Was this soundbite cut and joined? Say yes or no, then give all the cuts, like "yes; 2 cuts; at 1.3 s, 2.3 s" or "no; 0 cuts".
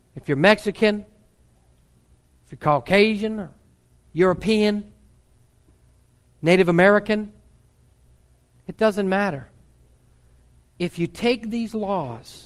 no; 0 cuts